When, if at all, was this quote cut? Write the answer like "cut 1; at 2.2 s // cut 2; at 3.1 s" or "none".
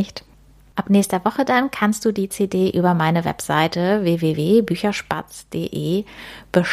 none